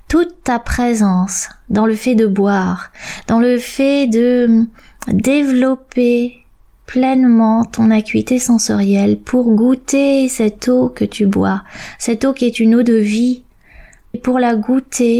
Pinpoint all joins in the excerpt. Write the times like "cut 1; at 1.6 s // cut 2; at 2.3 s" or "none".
cut 1; at 14.1 s